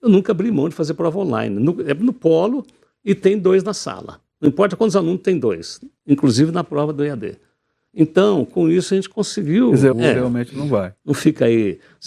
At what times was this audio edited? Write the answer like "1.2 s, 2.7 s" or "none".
9.9 s, 11.0 s